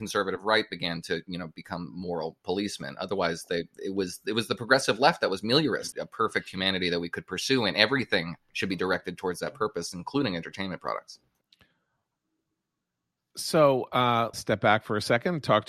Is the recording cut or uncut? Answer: cut